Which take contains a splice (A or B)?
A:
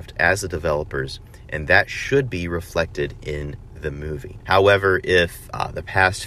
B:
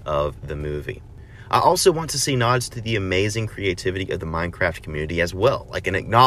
A